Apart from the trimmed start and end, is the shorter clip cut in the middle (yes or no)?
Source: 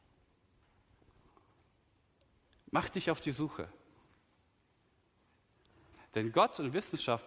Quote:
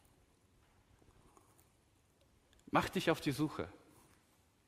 no